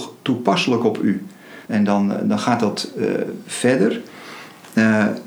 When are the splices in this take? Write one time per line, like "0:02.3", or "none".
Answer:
0:01.7